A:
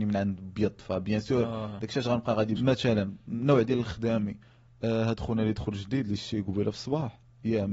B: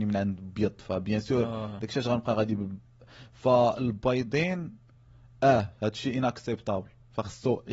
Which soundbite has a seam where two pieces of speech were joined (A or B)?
A